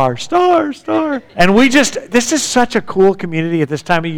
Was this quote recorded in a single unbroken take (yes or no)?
no